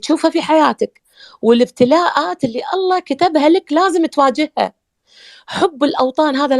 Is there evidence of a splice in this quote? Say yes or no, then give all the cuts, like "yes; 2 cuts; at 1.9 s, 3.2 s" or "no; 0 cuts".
no; 0 cuts